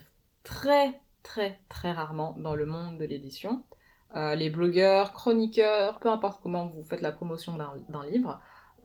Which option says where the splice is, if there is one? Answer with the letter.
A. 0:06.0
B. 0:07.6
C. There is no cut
A